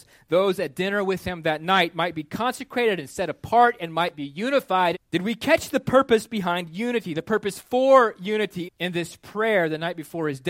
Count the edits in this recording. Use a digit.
2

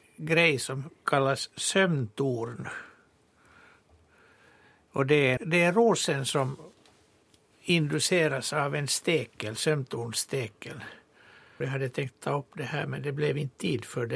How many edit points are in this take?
2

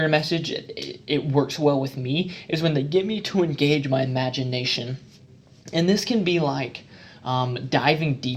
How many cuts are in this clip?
0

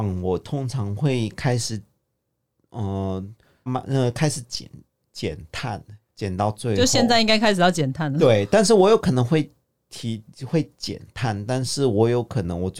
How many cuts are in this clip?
1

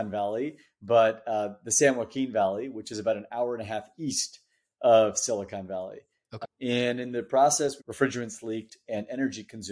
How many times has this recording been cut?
2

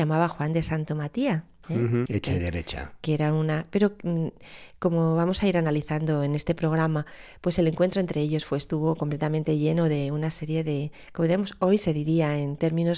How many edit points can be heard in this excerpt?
1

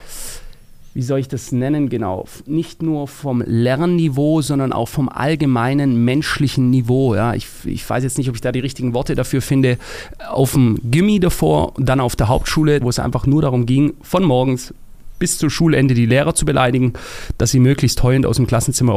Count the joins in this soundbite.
1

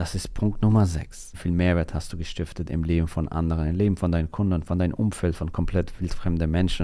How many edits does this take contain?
1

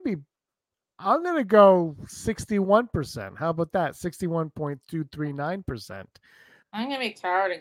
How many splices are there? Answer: 1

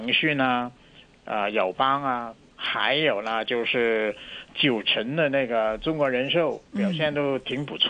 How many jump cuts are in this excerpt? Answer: 1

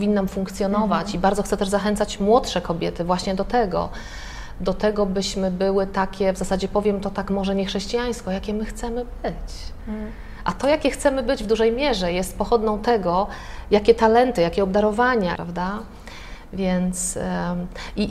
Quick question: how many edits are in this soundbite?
1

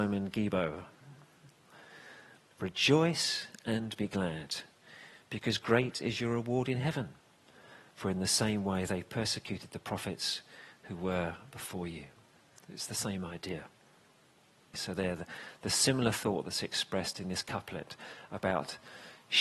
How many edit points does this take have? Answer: 2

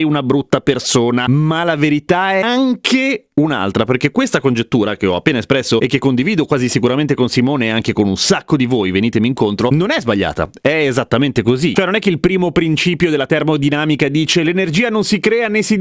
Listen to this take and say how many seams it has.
1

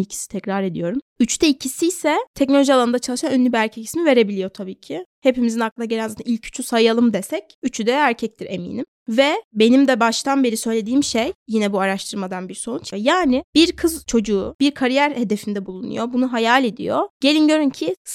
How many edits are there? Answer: 1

